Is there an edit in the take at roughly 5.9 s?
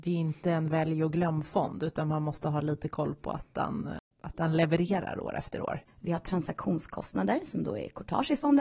yes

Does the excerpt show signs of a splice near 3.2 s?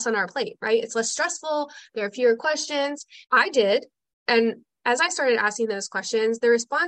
yes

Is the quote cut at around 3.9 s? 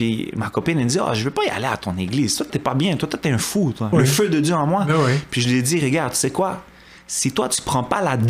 yes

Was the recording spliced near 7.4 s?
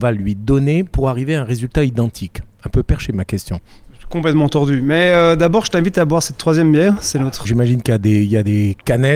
yes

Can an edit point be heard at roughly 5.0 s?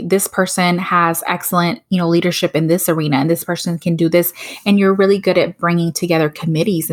no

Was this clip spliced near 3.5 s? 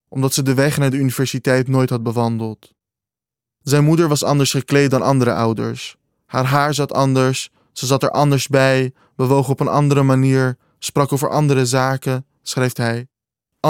yes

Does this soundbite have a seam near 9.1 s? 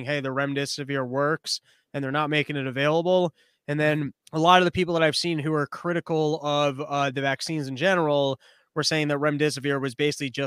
no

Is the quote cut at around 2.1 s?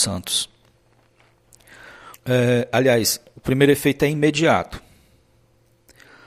yes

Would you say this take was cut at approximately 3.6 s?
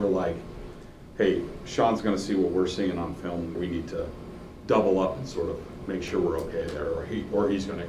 yes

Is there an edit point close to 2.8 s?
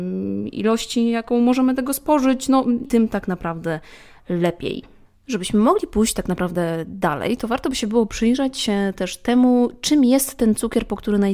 yes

